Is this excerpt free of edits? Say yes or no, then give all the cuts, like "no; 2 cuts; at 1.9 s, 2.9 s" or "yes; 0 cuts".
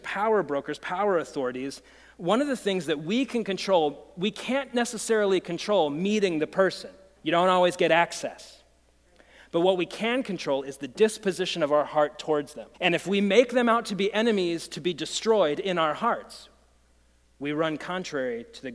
no; 2 cuts; at 7.2 s, 12.7 s